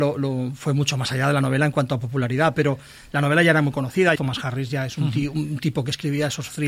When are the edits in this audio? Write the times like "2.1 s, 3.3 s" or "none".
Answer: 4.2 s